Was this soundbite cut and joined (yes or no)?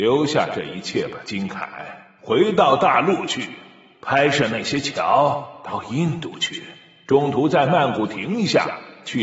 no